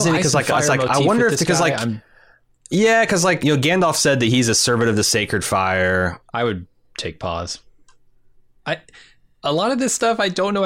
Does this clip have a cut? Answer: yes; 3 cuts; at 3.4 s, 6.3 s, 8.6 s

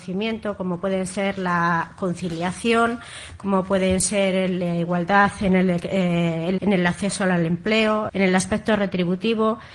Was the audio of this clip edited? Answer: yes; 2 cuts; at 6.6 s, 8.1 s

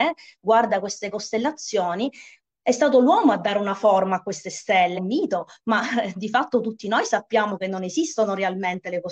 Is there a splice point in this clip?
yes; 1 cut; at 5.0 s

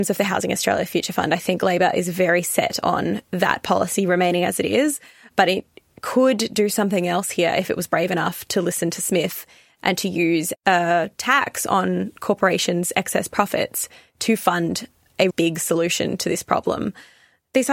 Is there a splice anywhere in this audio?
yes; 1 cut; at 15.3 s

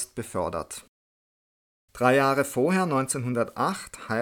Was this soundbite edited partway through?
no; 0 cuts

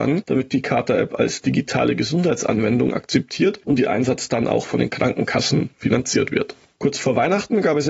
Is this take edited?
yes; 1 cut; at 6.8 s

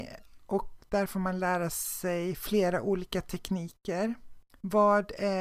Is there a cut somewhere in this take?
yes; 1 cut; at 4.5 s

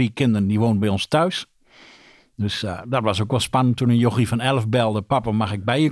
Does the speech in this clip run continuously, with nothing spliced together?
yes; 0 cuts

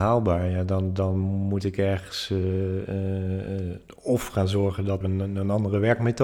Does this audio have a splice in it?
yes; 1 cut; at 5.0 s

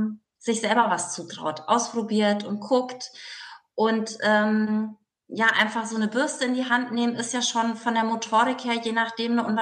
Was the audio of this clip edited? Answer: no; 0 cuts

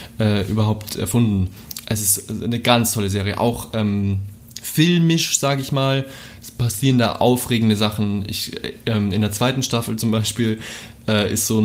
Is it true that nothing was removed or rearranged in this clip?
yes; 0 cuts

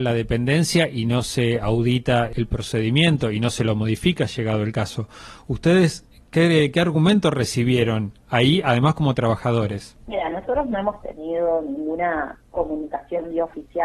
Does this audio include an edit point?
no; 0 cuts

